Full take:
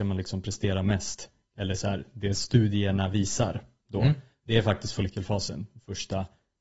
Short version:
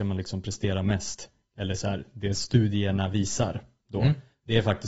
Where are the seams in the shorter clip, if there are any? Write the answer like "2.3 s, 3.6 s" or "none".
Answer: none